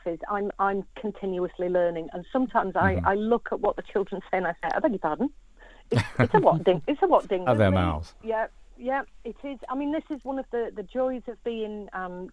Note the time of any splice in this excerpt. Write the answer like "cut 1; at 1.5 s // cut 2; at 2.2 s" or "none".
cut 1; at 7.5 s